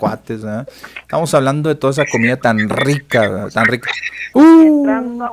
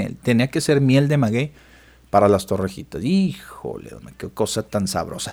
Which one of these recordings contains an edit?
first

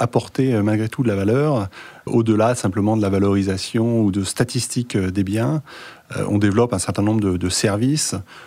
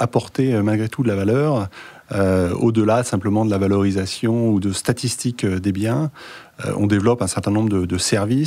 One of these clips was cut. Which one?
first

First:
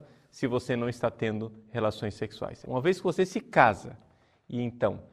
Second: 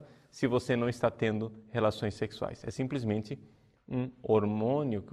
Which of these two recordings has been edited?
first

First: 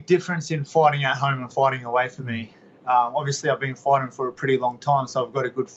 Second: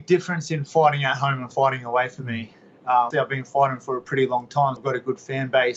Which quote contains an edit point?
second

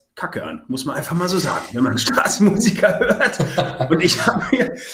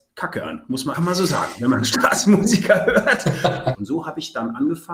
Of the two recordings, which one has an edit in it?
second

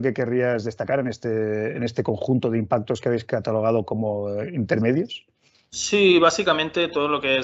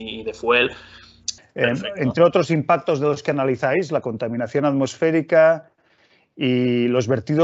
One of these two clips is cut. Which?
second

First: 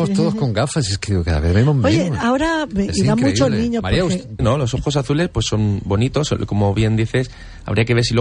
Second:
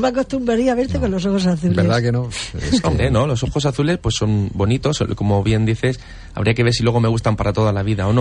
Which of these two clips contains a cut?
first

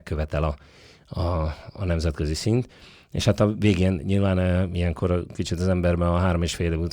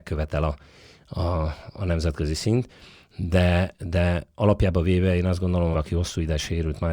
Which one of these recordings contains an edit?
second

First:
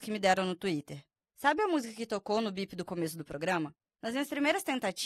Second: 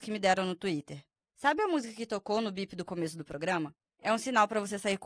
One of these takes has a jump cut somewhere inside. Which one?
first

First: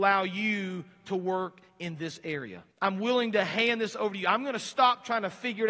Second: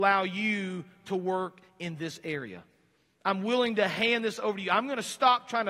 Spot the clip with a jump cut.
first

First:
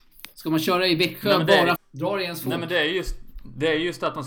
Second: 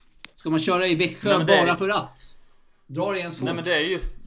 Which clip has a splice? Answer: first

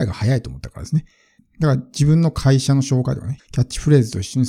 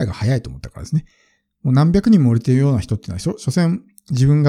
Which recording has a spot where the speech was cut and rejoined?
first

